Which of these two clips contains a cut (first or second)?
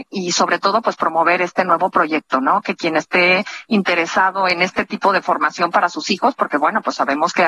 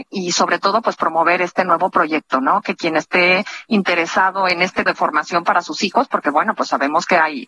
second